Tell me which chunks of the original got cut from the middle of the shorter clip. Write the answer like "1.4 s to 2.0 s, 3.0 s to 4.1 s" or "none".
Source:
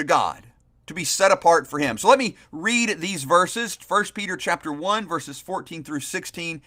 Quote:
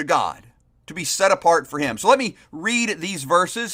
none